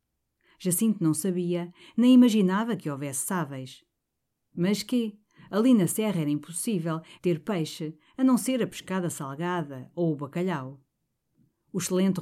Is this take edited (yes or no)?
yes